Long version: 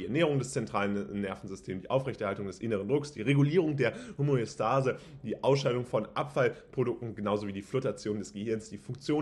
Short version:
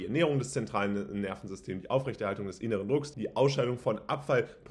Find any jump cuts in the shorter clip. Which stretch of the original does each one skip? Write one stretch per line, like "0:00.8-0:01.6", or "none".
0:03.1-0:05.2